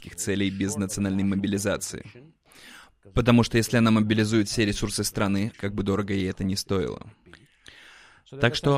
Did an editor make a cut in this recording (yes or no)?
yes